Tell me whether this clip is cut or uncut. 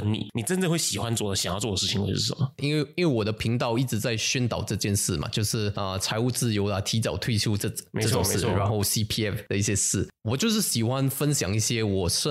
cut